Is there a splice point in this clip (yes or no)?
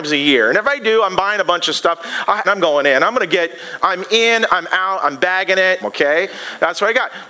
yes